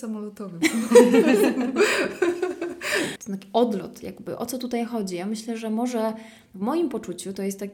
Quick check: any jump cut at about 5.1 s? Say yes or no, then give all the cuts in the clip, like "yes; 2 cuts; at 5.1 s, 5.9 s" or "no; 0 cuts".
no; 1 cut; at 3.2 s